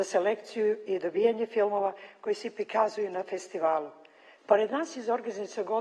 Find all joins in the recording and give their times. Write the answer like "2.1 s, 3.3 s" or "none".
4.4 s